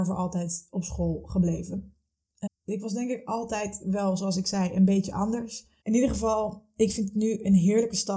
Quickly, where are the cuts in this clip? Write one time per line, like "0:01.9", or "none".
0:02.5
0:05.8